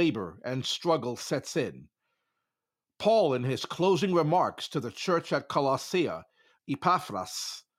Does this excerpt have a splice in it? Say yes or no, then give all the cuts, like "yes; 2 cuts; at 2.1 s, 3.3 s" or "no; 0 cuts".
yes; 1 cut; at 6.6 s